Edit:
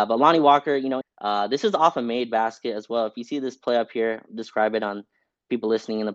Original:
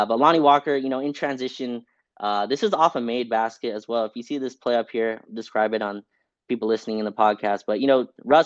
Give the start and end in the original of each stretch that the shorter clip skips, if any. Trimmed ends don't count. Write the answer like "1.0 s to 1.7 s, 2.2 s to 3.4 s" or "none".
1.0 s to 2.0 s